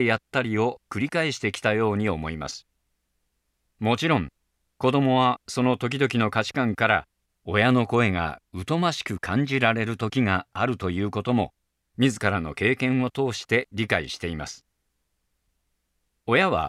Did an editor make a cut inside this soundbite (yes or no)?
no